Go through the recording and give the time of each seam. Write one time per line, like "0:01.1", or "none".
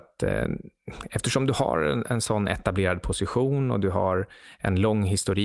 none